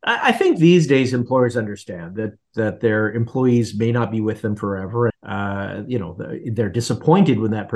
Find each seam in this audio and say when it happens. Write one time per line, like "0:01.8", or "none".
0:05.1